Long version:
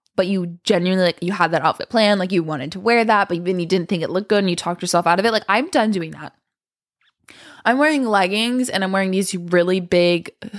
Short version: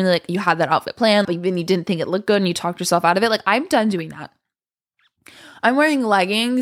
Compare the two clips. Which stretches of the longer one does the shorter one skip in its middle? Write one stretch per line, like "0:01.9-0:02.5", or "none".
0:02.2-0:03.3